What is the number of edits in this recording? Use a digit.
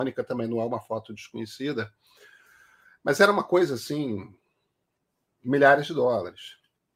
0